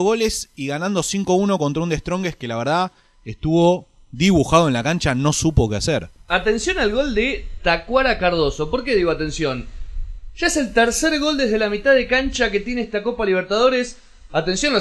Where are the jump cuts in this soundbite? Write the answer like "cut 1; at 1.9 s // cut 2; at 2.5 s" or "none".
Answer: none